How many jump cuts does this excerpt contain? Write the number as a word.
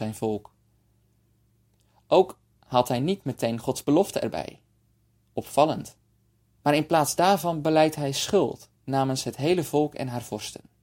two